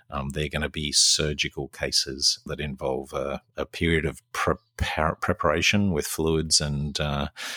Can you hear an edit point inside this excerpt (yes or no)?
yes